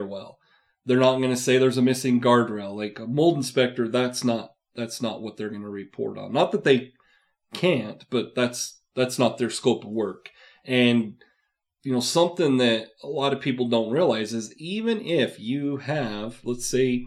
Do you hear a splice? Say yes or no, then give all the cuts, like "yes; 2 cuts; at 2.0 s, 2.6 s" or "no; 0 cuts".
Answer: no; 0 cuts